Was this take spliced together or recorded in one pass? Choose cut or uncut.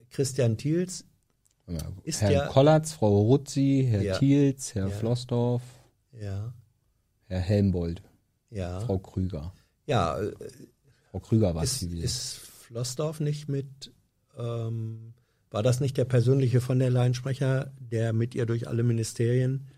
uncut